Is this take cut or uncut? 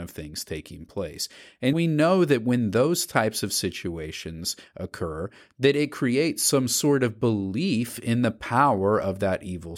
cut